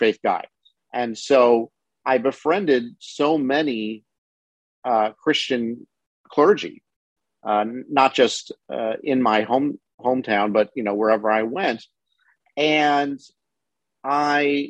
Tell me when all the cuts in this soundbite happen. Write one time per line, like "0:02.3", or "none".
none